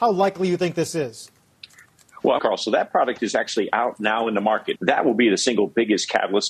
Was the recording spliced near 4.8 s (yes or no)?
yes